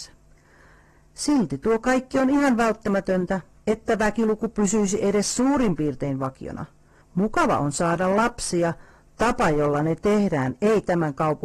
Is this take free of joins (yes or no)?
no